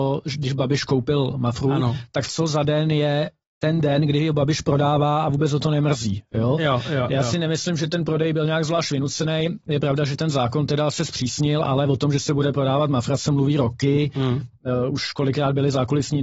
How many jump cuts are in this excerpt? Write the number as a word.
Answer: zero